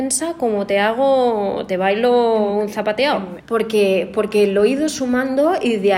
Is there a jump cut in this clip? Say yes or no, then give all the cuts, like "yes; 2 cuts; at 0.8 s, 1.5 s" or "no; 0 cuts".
yes; 1 cut; at 3.4 s